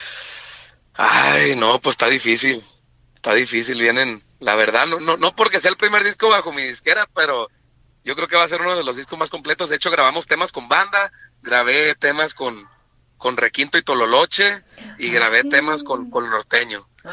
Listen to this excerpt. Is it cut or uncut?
uncut